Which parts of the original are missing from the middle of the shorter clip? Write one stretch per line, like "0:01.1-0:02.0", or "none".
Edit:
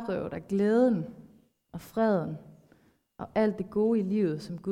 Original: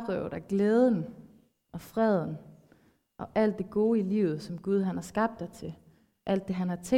none